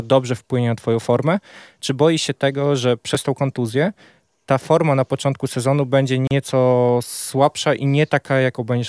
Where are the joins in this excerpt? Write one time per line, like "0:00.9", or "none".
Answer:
none